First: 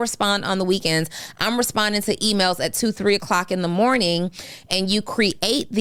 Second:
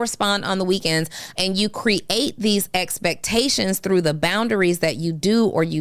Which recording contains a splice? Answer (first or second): second